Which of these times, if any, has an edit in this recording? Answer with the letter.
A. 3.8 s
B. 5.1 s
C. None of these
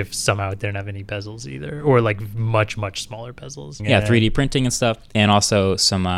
A